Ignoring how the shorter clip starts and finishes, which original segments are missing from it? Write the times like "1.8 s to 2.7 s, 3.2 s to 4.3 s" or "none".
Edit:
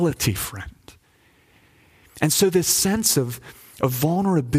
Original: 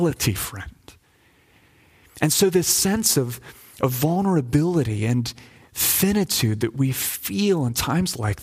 none